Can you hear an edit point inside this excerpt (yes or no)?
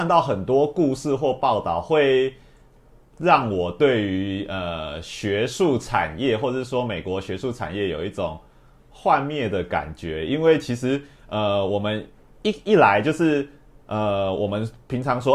no